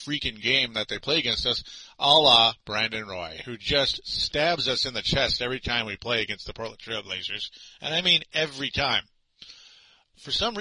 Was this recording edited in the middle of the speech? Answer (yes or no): no